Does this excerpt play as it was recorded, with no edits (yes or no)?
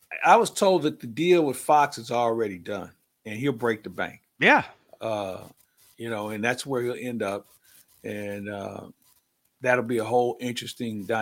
yes